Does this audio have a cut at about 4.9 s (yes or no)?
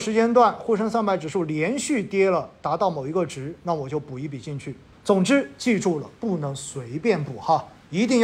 yes